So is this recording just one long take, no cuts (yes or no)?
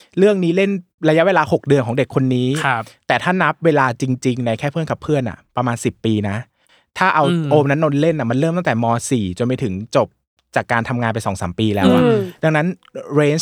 yes